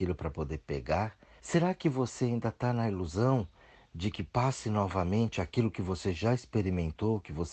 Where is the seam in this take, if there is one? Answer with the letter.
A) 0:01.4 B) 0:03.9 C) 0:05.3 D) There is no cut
A